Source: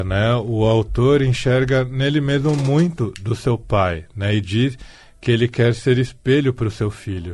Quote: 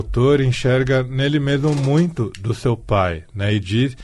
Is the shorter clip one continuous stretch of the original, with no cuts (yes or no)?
yes